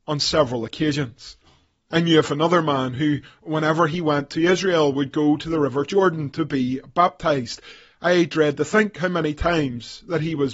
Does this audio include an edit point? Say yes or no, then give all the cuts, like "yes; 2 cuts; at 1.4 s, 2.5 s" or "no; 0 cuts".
no; 0 cuts